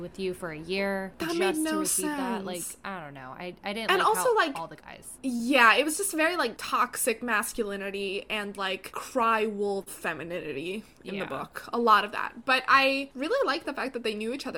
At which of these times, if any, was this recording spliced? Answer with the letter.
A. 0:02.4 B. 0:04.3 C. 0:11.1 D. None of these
D